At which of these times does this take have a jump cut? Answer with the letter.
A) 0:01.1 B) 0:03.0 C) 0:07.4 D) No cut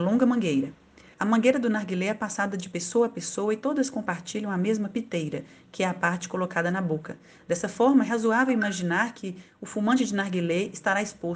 A